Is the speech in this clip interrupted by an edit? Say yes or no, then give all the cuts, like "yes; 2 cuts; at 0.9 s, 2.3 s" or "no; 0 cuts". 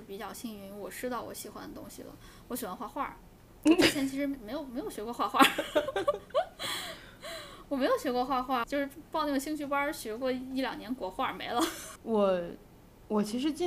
yes; 2 cuts; at 8.6 s, 12.0 s